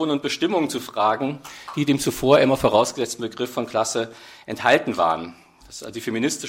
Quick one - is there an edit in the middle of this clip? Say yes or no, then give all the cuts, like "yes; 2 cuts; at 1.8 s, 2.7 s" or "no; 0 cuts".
no; 0 cuts